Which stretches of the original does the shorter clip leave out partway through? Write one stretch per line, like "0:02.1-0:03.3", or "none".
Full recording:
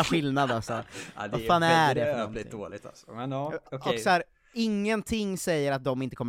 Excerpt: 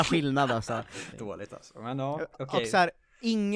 0:01.1-0:02.4